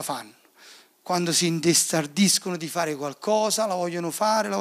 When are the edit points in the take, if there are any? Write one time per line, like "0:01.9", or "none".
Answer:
none